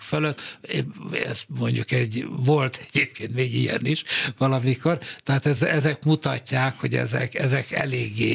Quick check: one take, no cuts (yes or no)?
yes